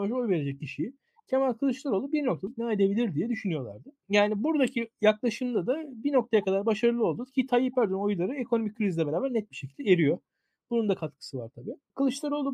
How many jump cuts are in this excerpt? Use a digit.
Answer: 0